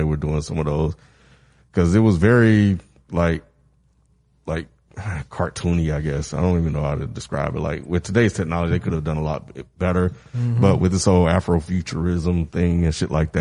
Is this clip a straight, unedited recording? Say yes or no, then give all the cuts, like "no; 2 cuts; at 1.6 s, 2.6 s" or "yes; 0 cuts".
yes; 0 cuts